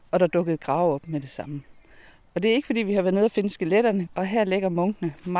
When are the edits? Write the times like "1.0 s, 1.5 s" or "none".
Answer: 4.1 s